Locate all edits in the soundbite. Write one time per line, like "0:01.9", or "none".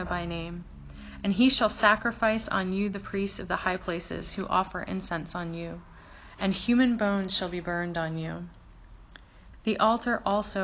0:09.5